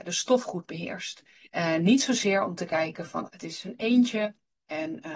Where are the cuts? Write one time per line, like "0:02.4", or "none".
0:01.5
0:03.3